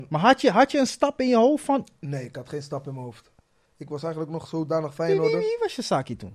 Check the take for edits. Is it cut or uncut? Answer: uncut